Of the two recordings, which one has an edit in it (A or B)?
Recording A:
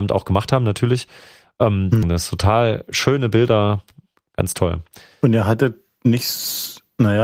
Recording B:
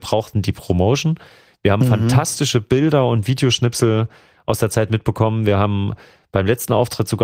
A